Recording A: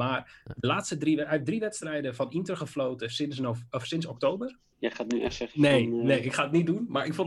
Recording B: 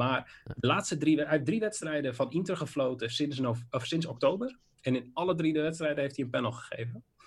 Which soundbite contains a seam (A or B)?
A